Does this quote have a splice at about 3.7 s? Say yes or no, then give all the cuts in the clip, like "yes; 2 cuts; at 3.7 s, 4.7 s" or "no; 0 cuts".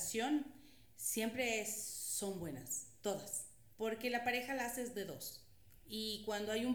yes; 1 cut; at 3.7 s